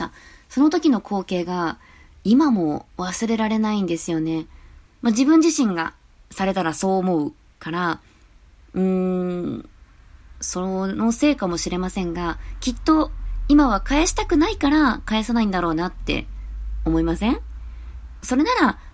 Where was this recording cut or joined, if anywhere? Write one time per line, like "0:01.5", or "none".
0:04.9